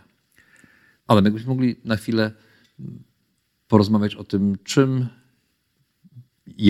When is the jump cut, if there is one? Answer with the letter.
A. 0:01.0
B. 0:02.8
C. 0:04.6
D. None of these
A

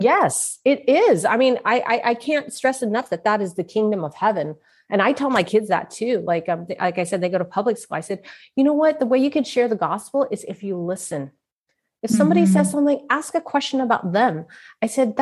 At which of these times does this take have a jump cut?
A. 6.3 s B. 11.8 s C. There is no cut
C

